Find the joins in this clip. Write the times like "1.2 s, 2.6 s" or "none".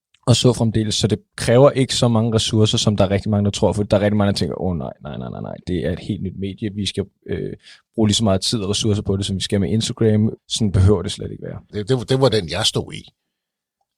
10.4 s, 11.7 s